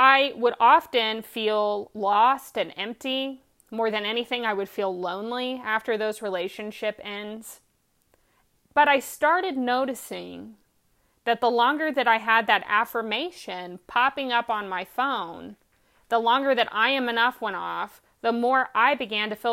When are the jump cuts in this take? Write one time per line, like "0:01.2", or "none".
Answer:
none